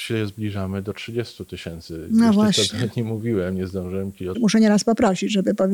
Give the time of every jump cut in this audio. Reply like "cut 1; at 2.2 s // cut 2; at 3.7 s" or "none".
cut 1; at 4.3 s